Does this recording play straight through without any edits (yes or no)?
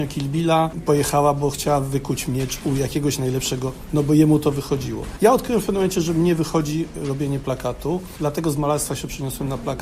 yes